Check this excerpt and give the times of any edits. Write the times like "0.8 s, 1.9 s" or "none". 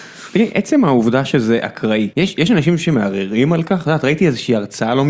2.1 s